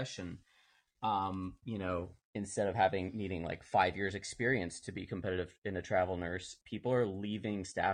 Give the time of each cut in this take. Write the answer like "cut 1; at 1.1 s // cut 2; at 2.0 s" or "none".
cut 1; at 6.6 s